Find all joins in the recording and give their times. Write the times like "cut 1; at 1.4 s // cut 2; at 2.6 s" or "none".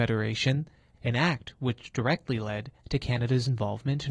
cut 1; at 0.9 s